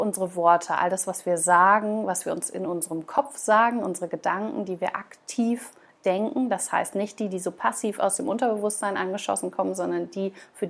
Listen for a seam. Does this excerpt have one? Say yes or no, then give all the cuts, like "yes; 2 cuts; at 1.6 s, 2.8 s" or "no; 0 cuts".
no; 0 cuts